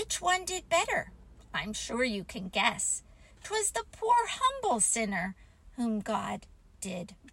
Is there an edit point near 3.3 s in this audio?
no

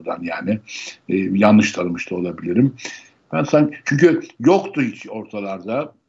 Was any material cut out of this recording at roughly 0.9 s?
no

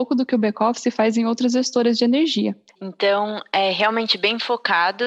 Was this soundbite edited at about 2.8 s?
yes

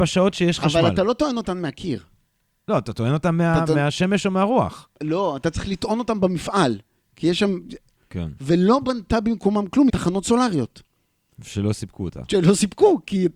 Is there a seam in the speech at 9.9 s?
yes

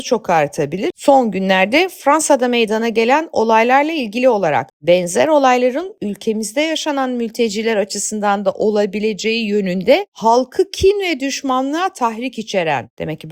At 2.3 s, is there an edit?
no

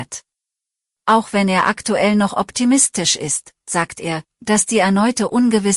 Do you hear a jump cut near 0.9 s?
yes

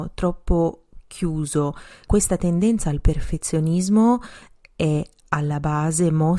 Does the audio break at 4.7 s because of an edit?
no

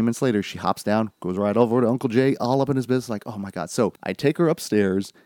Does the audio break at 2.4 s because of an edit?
no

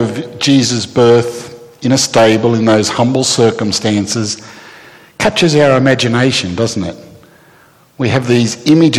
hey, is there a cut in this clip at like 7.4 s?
no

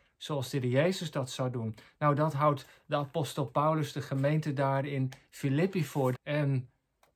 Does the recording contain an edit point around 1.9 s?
no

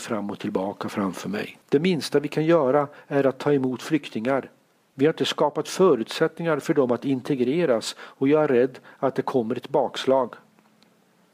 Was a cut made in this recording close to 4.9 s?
yes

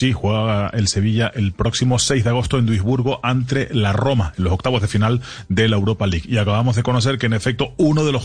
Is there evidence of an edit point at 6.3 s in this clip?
no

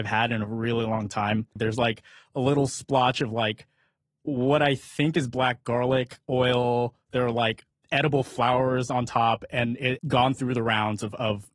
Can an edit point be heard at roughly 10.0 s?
yes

